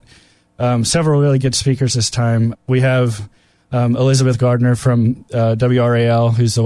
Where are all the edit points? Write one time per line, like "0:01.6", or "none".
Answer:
none